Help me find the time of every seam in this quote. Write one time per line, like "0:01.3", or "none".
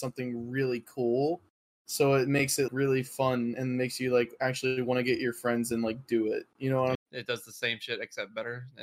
0:02.7
0:07.0

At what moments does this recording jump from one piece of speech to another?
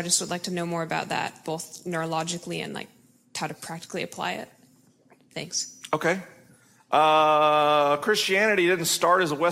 none

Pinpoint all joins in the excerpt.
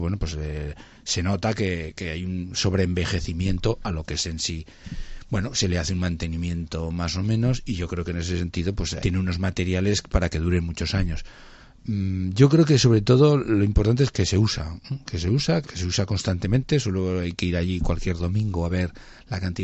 0:09.0
0:14.1
0:15.6

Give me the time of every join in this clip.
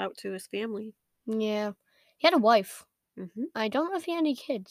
none

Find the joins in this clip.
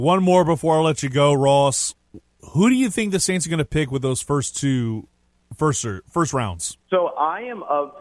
0:06.8

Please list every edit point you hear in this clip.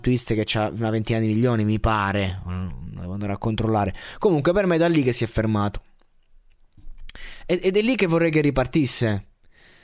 none

